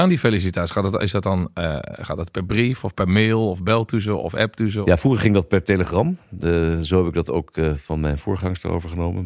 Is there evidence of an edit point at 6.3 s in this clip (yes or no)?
no